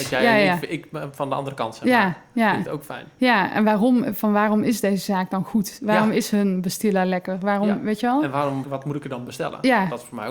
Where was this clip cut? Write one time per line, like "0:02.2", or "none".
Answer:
0:08.6

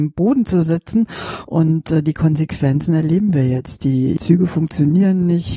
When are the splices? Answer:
0:01.4

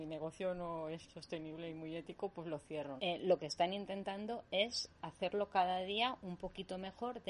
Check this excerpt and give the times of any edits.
0:01.1
0:03.0

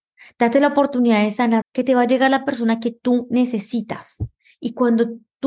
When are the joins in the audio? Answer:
0:01.6

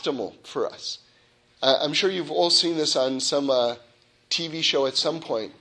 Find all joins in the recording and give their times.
0:01.5

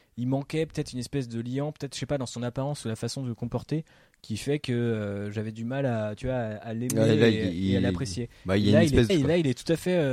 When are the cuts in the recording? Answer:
0:09.1

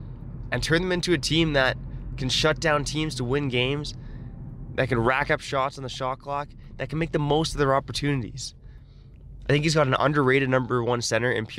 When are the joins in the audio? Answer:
none

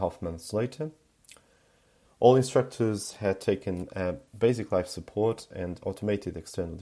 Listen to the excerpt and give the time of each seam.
0:02.1

